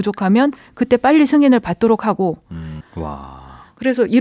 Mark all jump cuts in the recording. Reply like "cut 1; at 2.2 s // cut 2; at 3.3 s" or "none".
cut 1; at 2.8 s